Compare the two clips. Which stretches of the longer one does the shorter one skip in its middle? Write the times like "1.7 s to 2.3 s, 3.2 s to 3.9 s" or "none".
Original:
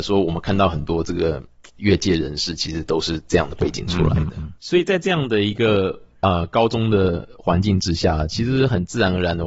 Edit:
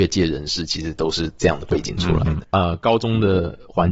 4.3 s to 6.1 s